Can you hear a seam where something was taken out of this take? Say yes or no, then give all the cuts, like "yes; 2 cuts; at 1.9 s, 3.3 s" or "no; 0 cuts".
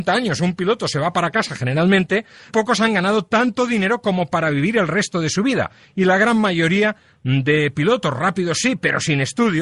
yes; 1 cut; at 2.5 s